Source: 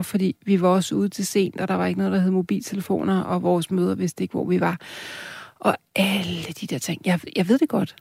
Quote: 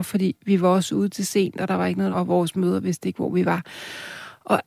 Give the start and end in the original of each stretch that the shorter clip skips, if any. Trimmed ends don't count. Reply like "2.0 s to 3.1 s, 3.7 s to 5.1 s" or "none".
2.1 s to 3.3 s